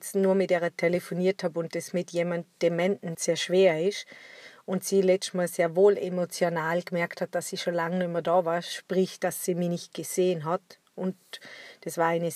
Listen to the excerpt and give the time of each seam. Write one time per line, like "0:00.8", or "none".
0:03.1